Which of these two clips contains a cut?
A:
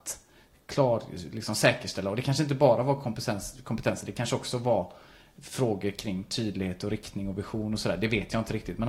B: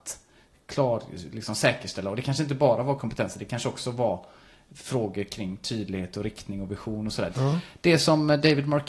B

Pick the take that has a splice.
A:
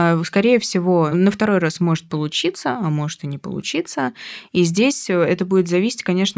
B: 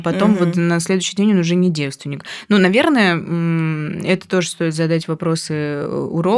A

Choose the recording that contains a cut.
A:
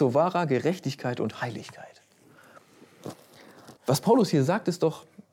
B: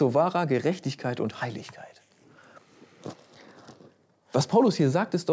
A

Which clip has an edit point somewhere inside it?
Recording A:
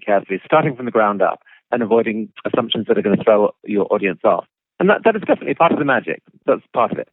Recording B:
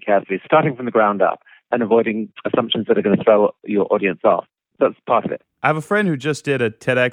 B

